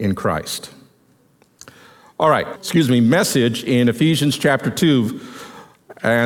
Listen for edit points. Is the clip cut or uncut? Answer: cut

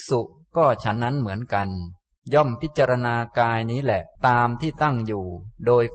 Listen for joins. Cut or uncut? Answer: cut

